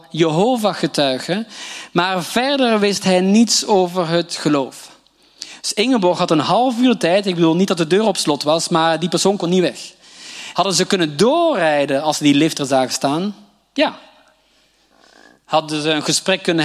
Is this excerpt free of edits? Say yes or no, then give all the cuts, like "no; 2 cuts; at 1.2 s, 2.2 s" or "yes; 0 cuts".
no; 1 cut; at 10.5 s